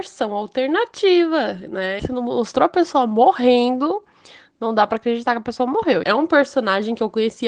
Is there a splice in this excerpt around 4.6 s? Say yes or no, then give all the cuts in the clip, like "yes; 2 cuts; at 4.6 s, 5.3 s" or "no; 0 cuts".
no; 2 cuts; at 2.0 s, 6.0 s